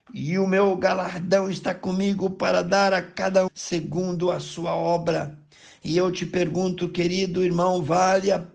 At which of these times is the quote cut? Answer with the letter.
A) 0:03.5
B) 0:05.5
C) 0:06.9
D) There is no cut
A